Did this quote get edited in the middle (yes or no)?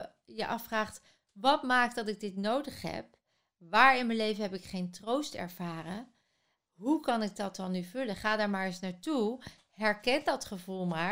no